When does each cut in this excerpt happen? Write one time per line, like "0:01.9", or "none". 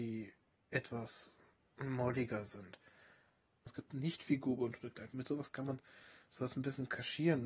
0:03.7